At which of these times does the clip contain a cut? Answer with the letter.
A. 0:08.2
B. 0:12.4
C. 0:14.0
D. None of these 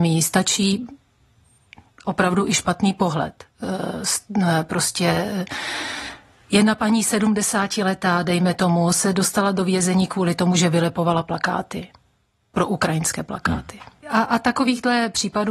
C